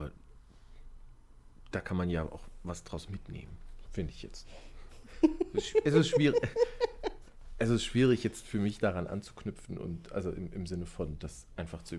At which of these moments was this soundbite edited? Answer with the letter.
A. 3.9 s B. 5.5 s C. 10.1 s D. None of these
A